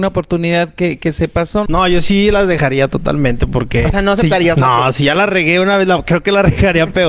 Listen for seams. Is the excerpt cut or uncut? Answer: cut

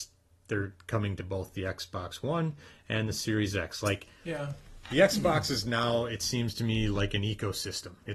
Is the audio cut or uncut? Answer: uncut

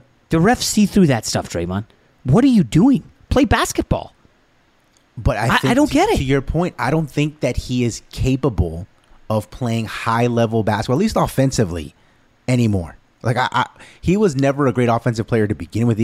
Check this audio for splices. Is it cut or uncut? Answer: uncut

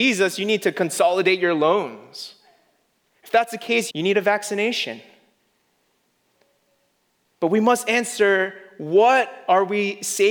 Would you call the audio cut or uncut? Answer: cut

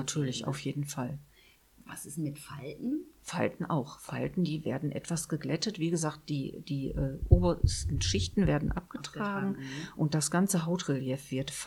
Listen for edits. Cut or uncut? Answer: uncut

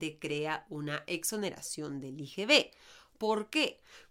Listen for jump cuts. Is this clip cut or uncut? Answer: uncut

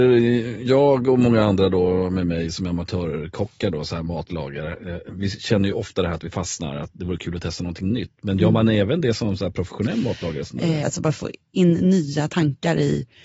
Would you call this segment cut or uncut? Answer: cut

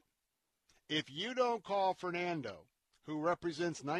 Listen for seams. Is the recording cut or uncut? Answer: uncut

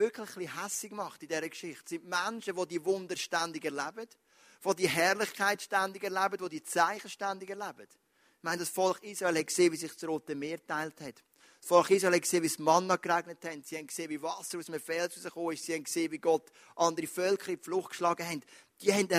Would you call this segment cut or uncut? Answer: uncut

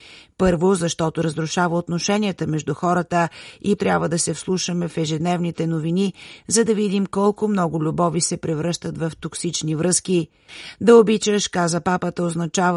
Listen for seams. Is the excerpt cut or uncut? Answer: cut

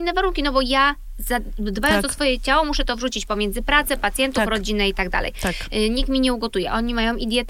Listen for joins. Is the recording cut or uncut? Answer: uncut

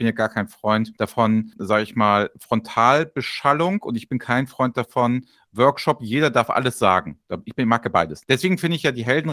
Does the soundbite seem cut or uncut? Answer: cut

